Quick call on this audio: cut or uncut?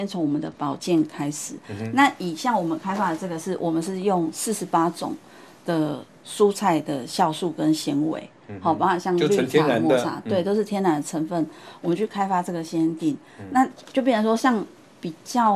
uncut